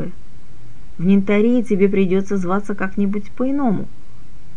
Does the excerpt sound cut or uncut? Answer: uncut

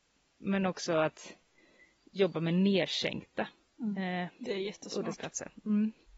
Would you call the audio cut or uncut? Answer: uncut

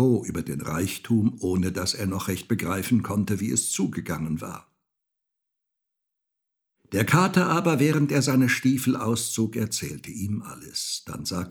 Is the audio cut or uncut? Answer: uncut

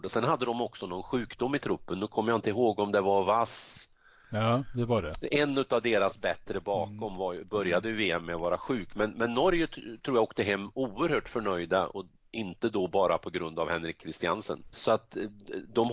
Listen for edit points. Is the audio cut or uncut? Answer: cut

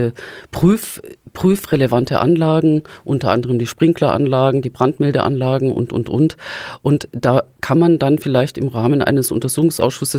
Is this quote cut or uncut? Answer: uncut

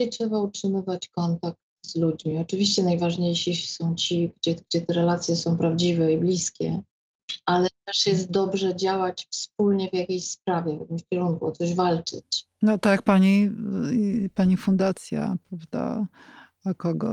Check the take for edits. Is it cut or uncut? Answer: uncut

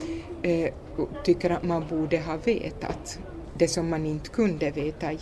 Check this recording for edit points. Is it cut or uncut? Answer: uncut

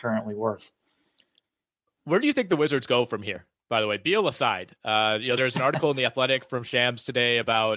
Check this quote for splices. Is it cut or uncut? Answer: uncut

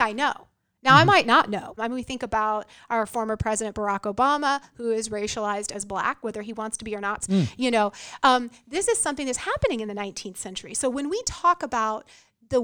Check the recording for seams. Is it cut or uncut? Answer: cut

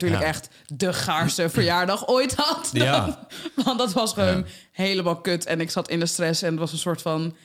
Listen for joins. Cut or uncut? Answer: uncut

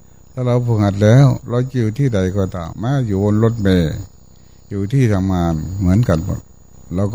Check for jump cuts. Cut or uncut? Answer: cut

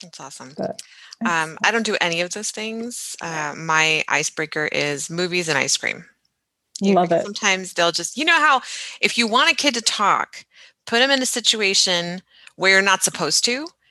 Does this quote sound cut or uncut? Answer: uncut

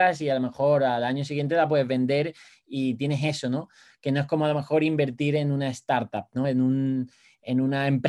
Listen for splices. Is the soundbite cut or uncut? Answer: uncut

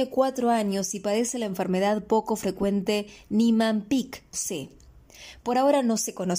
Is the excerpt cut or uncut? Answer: cut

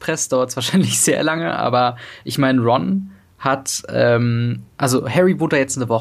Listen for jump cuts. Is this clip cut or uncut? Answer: cut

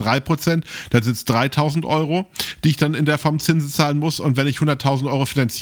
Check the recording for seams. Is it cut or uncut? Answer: uncut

